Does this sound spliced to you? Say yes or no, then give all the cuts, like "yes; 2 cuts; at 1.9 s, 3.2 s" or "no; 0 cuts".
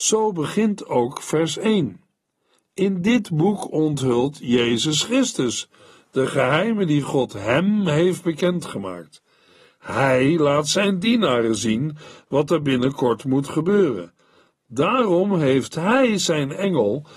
no; 0 cuts